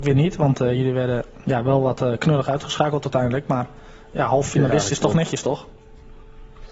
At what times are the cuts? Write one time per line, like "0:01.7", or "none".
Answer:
none